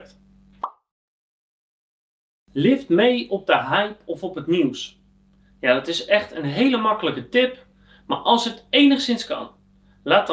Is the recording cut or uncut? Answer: uncut